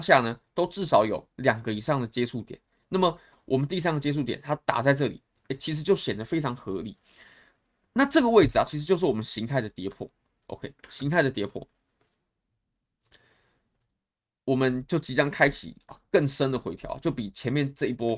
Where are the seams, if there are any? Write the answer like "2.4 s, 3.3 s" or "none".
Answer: 8.7 s